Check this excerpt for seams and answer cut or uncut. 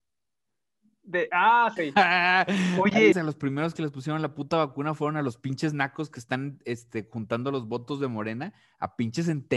cut